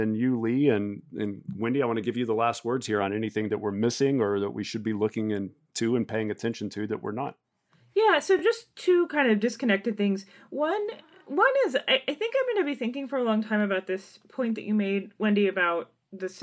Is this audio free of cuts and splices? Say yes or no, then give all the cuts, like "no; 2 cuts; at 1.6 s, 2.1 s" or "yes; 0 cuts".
yes; 0 cuts